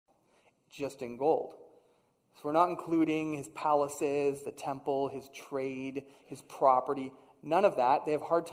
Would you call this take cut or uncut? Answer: uncut